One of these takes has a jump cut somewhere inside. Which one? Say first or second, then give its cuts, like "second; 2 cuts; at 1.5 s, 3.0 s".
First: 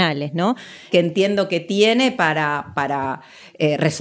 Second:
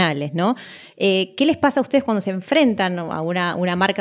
first; 1 cut; at 0.9 s